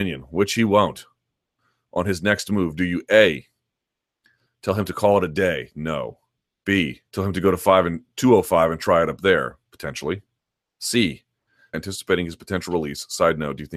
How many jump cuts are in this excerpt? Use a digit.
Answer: 2